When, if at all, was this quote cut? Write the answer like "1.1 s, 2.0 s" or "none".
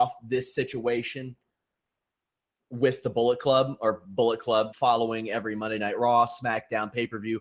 4.7 s